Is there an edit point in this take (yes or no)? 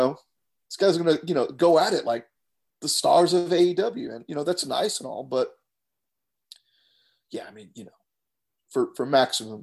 no